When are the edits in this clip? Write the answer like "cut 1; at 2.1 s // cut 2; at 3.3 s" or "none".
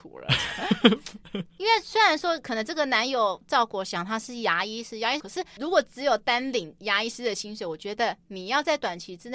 cut 1; at 5.2 s